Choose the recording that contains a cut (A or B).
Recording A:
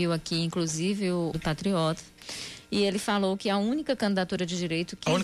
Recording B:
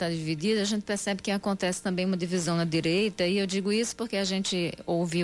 A